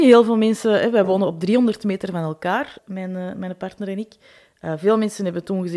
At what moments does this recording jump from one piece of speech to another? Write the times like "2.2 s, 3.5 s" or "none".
2.8 s